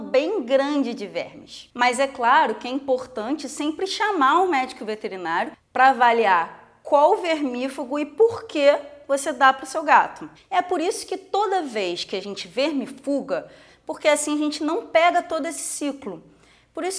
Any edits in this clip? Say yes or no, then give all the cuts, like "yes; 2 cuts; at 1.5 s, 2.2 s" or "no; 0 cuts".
yes; 2 cuts; at 10.3 s, 13.7 s